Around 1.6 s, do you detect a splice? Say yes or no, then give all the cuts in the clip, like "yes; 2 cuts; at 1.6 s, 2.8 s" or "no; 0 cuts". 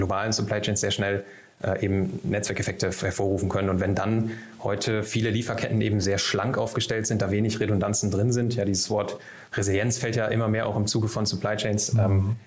no; 0 cuts